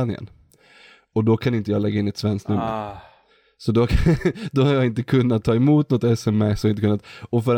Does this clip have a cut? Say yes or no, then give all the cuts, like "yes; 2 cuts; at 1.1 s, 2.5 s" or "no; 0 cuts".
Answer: no; 0 cuts